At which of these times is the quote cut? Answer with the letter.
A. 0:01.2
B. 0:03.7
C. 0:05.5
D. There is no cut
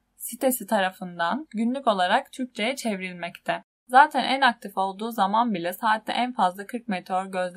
B